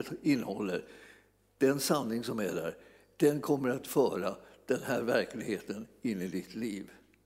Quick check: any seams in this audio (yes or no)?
no